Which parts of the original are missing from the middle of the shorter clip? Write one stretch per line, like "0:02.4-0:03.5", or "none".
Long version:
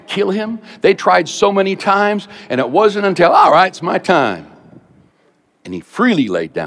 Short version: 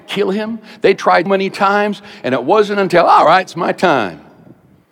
0:01.3-0:01.5